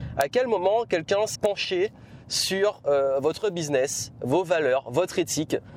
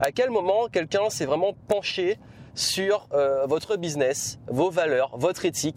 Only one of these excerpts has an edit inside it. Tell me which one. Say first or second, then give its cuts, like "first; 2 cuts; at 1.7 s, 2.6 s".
first; 1 cut; at 1.4 s